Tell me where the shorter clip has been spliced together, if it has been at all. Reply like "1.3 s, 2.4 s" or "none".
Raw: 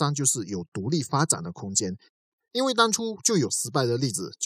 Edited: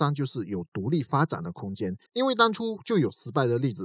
2.1 s